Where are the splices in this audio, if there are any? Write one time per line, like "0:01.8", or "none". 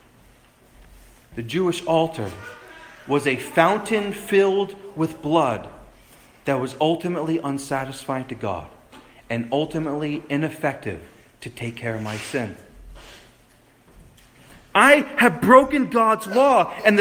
0:14.7